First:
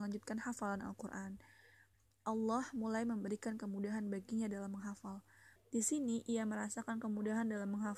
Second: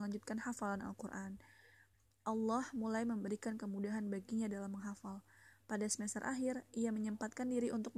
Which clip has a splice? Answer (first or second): first